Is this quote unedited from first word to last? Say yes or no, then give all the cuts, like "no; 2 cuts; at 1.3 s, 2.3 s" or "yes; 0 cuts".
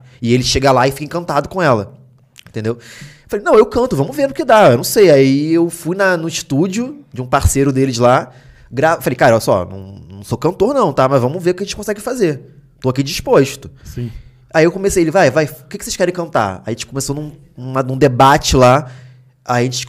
yes; 0 cuts